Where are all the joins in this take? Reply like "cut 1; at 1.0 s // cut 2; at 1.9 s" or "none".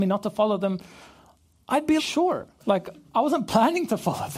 cut 1; at 2.0 s